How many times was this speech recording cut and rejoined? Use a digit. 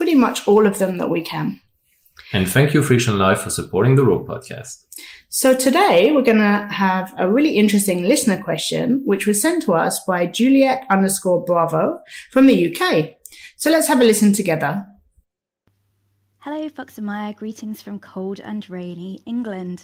0